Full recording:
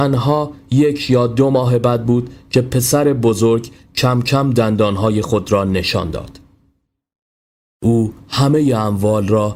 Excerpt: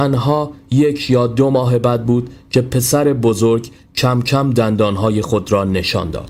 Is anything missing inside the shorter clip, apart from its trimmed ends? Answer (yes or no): no